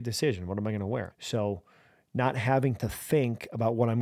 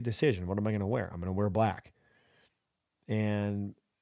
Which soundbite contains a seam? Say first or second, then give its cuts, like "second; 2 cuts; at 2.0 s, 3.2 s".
first; 1 cut; at 1.1 s